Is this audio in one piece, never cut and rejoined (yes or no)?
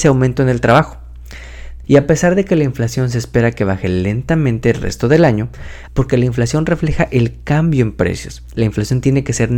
no